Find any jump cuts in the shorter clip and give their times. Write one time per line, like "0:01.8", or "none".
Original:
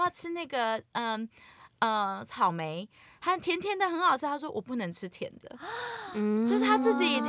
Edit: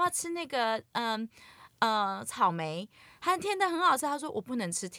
0:03.4